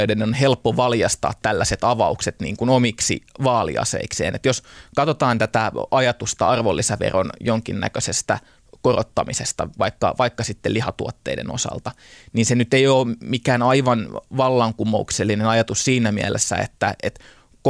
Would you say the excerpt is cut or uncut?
uncut